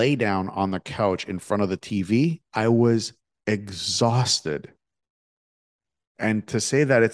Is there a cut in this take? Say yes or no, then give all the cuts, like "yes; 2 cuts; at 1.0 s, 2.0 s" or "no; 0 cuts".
yes; 1 cut; at 2.5 s